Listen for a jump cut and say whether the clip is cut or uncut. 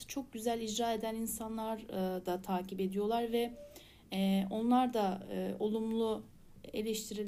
uncut